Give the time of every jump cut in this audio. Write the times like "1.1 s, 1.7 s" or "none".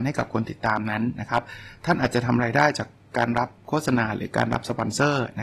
none